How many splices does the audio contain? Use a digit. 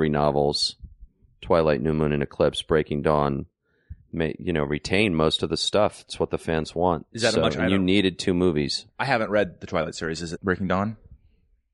2